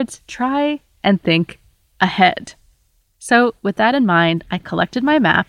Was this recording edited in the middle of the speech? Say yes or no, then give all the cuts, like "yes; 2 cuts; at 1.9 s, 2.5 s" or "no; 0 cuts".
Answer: no; 0 cuts